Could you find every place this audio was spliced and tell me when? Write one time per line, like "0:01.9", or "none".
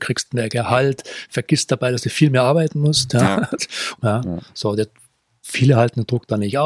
0:04.0